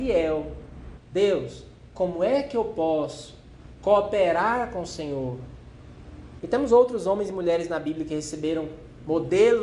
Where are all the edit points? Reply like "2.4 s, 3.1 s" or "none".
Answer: 1.0 s, 6.4 s